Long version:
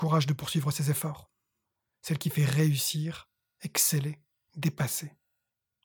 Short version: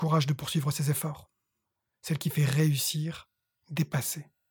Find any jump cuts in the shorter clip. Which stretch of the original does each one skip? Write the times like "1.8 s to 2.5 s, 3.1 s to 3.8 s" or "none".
3.5 s to 4.4 s